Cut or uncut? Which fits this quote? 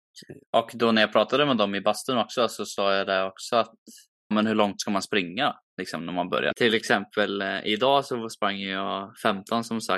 cut